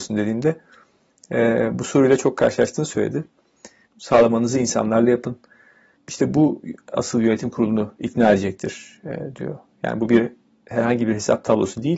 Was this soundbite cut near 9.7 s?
no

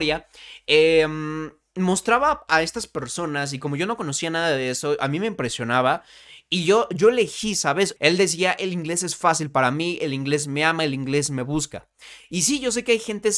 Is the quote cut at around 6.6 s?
no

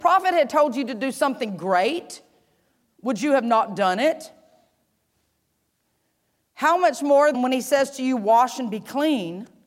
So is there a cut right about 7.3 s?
yes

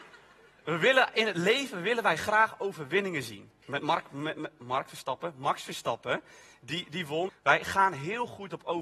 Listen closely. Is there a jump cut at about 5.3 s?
no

